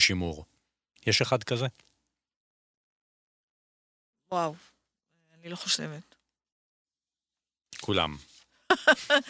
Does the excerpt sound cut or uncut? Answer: uncut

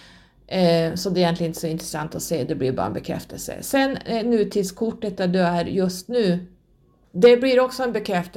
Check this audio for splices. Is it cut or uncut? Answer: uncut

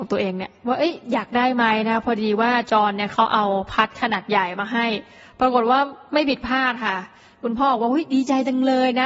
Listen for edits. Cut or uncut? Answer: uncut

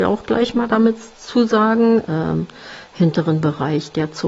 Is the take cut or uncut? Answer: cut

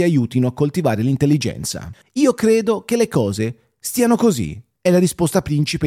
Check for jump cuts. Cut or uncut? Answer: cut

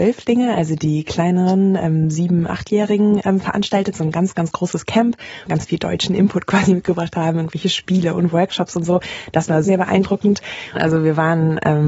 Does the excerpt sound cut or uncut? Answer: cut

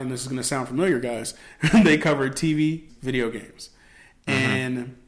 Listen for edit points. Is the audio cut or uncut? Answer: cut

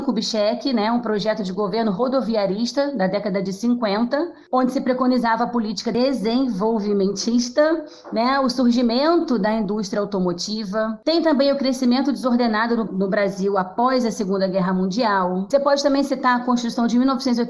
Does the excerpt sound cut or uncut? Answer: cut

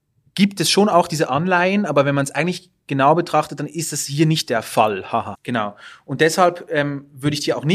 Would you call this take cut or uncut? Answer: cut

